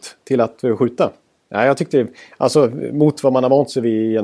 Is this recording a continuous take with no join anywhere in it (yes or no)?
no